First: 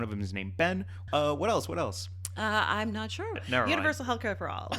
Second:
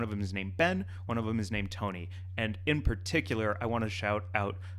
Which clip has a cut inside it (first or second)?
first